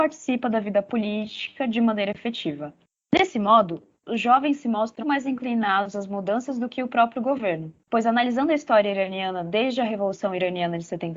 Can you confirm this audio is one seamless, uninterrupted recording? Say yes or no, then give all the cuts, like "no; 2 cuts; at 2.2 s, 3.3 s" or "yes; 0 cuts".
no; 1 cut; at 5.0 s